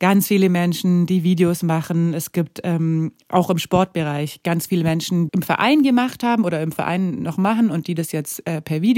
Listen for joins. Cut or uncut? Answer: cut